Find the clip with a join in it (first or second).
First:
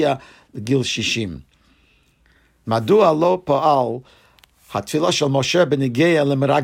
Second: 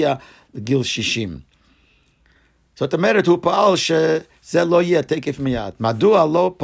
first